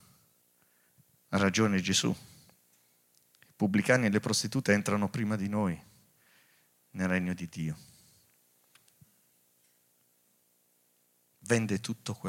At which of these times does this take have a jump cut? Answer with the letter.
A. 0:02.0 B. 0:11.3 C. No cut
C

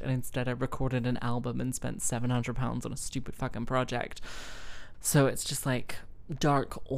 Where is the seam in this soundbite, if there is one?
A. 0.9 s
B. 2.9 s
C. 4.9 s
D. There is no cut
C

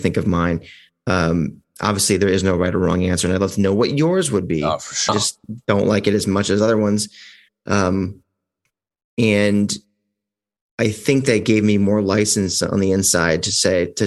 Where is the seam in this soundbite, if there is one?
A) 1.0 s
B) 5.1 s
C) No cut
B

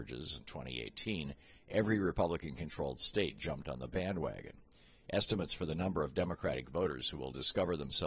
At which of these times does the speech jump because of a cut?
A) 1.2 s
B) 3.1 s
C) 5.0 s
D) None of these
D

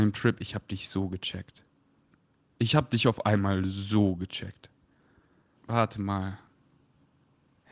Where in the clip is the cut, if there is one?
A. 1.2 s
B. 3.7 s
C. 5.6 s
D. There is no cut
C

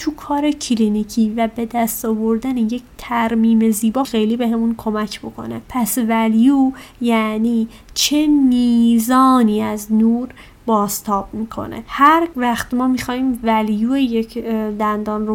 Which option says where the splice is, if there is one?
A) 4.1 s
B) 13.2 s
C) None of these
A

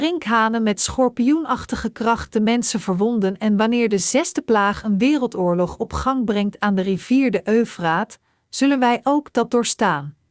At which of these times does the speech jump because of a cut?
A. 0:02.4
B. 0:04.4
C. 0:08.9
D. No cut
D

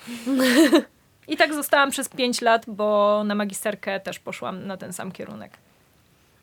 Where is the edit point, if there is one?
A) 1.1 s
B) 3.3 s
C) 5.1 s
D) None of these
D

